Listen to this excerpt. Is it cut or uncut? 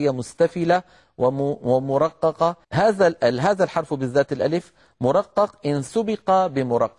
cut